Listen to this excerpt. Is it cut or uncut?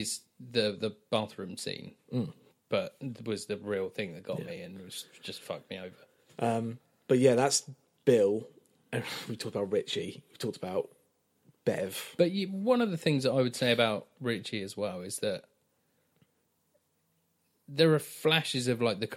uncut